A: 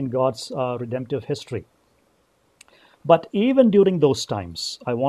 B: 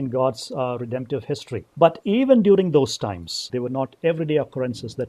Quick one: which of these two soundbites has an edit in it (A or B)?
B